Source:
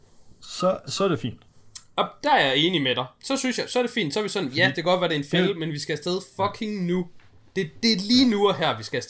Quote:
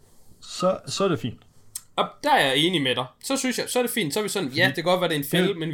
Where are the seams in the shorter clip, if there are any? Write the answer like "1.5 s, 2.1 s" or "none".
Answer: none